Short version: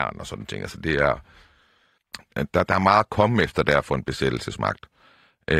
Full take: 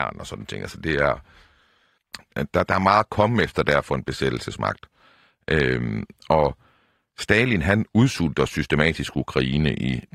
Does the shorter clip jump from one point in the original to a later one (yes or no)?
no